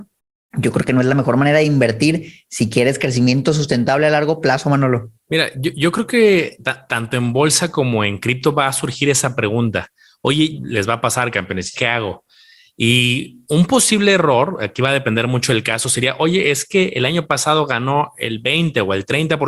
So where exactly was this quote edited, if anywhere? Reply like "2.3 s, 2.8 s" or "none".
10.6 s, 11.7 s